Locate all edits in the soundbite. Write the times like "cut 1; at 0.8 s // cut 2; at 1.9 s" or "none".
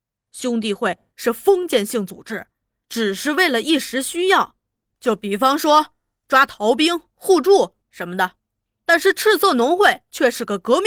none